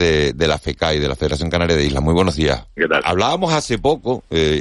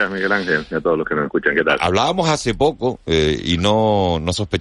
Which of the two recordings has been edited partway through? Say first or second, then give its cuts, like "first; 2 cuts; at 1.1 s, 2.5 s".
first; 1 cut; at 2.8 s